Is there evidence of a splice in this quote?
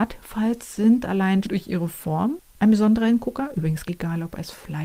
yes; 2 cuts; at 1.4 s, 3.9 s

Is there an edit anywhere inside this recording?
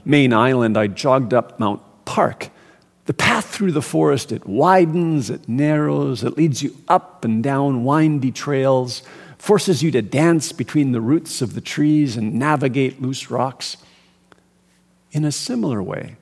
no; 0 cuts

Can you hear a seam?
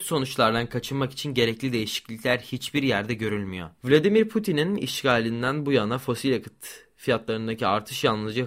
yes; 1 cut; at 3.8 s

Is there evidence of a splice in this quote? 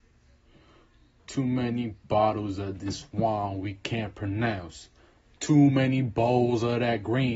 no; 0 cuts

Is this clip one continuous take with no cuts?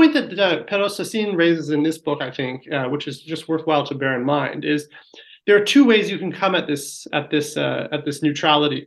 yes; 0 cuts

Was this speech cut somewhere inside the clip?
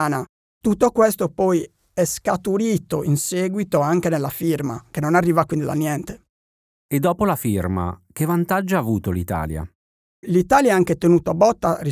yes; 2 cuts; at 8.1 s, 10.1 s

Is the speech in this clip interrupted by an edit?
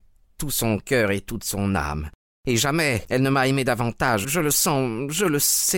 yes; 1 cut; at 4.2 s

